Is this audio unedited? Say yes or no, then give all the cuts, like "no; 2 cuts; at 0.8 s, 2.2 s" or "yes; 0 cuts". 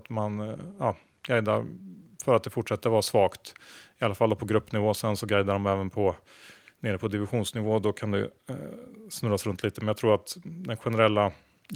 yes; 0 cuts